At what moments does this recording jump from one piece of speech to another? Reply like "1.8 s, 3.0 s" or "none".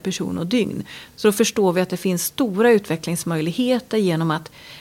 none

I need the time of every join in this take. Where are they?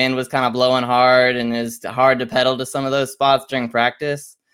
none

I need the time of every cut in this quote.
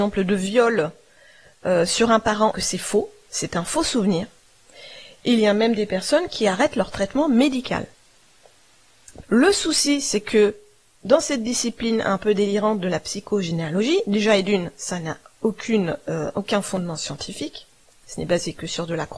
2.5 s, 9.2 s

